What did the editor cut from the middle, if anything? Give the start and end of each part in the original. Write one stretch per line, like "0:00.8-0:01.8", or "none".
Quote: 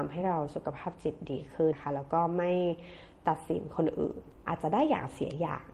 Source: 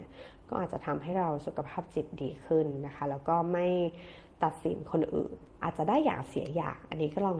0:02.6-0:02.9